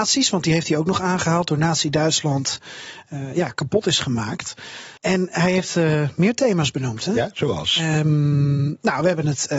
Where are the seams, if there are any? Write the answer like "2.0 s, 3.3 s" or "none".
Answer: 5.0 s